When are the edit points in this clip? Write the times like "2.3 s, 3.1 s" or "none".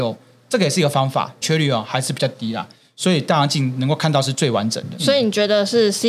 1.4 s, 5.0 s

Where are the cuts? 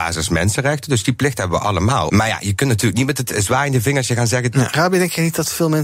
2.1 s, 4.5 s

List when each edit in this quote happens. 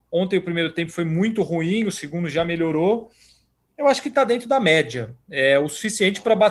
none

